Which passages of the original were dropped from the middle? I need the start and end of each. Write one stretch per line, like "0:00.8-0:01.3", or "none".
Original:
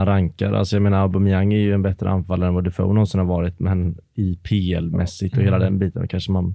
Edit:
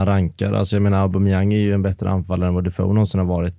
none